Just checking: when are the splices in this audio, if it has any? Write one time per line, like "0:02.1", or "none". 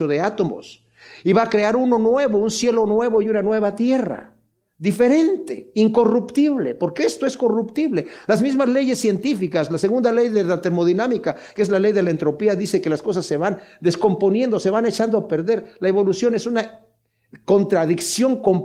none